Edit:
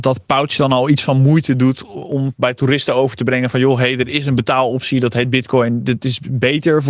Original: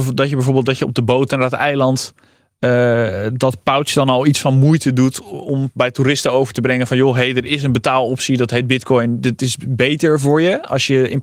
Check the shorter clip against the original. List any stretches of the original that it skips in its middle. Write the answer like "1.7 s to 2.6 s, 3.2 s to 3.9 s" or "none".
none